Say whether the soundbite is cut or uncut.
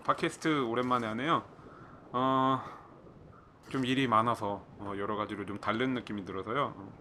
cut